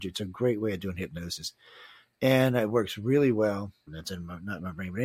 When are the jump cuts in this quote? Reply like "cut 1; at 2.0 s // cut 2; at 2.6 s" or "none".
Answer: cut 1; at 3.9 s